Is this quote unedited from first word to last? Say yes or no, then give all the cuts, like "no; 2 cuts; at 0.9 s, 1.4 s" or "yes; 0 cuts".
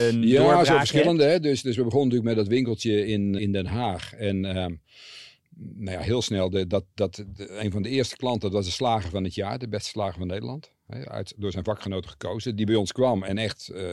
no; 1 cut; at 3.4 s